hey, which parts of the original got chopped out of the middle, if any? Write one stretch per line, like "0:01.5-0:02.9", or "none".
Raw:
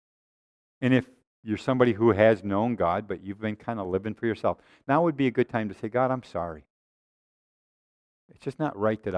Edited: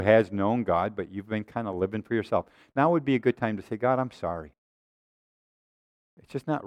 none